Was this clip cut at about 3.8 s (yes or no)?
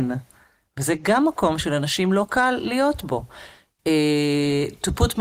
yes